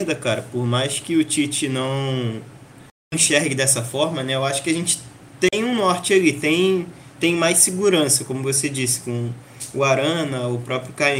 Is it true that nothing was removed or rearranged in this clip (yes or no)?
yes